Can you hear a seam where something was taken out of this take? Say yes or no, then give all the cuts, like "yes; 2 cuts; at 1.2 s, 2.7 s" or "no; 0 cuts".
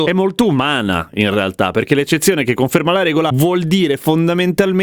no; 0 cuts